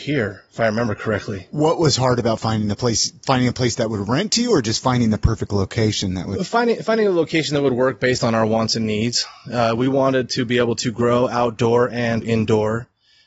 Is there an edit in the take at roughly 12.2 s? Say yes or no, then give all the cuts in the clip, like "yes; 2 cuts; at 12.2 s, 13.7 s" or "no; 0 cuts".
yes; 1 cut; at 12.2 s